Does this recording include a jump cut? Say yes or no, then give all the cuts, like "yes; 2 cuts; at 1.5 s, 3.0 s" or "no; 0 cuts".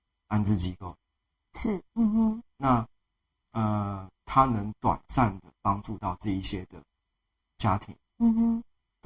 yes; 2 cuts; at 1.9 s, 4.1 s